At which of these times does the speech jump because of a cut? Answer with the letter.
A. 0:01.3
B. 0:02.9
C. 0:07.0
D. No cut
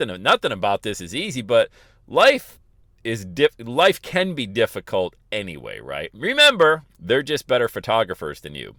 C